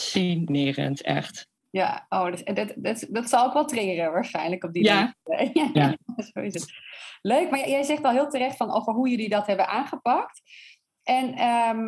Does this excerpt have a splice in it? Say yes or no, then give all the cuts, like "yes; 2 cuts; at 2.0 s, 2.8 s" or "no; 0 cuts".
no; 0 cuts